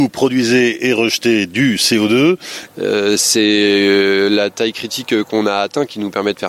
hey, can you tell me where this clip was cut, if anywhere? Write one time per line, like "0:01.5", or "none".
0:02.7